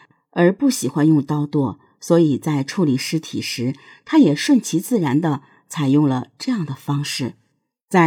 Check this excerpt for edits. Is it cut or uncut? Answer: uncut